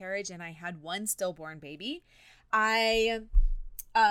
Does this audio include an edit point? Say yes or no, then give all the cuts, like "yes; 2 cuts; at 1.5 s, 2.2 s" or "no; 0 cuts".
no; 0 cuts